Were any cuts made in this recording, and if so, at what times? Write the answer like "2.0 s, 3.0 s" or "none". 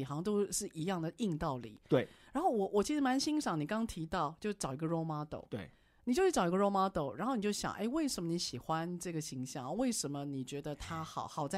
none